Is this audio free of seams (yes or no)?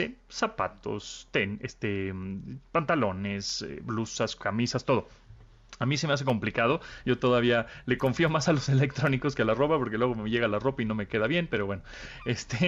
yes